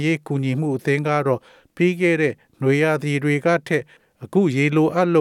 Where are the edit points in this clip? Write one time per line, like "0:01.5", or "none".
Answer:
none